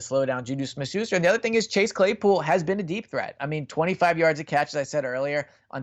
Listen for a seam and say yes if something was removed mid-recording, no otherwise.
no